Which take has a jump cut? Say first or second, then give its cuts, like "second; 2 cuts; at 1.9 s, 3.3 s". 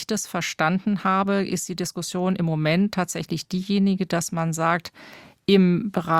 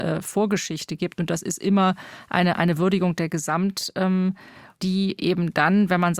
second; 1 cut; at 4.8 s